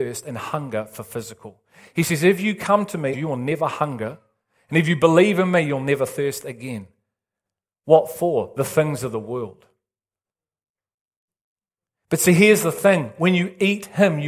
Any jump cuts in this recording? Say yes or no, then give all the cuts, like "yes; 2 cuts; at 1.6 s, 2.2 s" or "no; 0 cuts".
yes; 1 cut; at 3.1 s